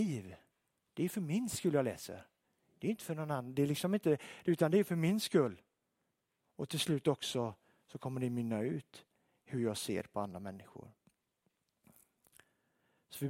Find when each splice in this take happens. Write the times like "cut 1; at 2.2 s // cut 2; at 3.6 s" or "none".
none